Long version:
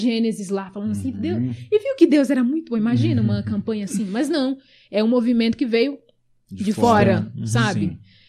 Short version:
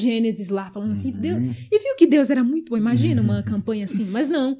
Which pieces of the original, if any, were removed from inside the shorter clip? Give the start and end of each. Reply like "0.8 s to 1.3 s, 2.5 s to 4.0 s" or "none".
none